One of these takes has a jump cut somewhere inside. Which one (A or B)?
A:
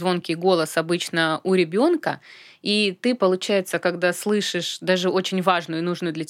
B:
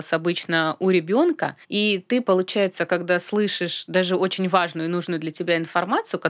B